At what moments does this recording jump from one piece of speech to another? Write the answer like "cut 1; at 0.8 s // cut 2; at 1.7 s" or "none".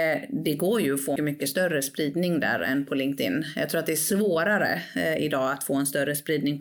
cut 1; at 1.2 s